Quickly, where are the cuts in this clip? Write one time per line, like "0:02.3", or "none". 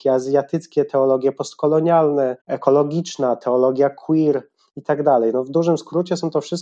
0:02.4